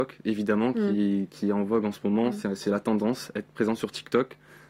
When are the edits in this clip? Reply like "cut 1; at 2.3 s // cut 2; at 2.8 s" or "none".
none